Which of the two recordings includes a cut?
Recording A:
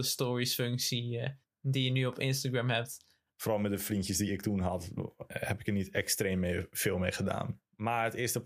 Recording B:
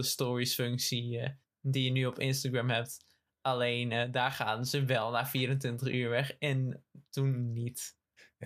A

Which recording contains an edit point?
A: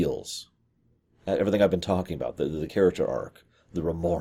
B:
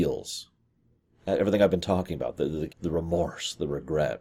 B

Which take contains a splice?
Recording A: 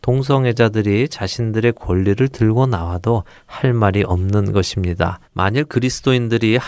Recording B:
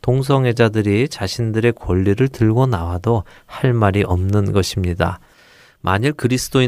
A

